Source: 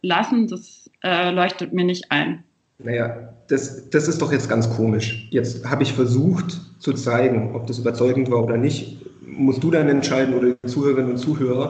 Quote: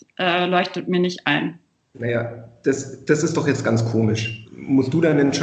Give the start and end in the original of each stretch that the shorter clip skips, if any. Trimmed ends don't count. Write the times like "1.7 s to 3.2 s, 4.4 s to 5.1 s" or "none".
5.3 s to 9.1 s